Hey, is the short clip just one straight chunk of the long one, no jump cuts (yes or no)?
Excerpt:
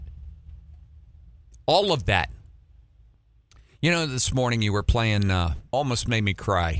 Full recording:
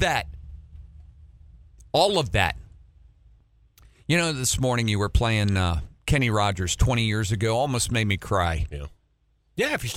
no